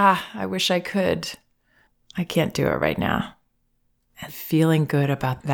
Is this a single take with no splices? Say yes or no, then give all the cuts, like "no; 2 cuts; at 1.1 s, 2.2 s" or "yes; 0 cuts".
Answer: no; 1 cut; at 4.3 s